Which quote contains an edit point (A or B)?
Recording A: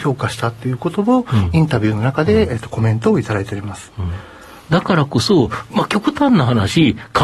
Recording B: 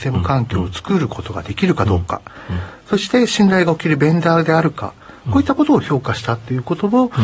A